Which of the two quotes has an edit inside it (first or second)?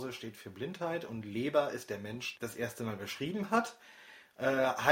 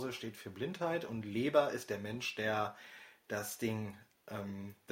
first